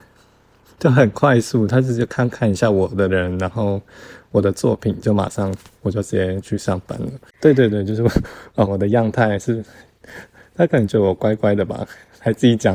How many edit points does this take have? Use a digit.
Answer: 2